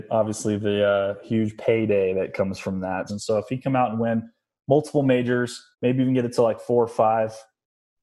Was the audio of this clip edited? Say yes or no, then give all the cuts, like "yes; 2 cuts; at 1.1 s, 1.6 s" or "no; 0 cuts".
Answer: yes; 2 cuts; at 3.1 s, 5.7 s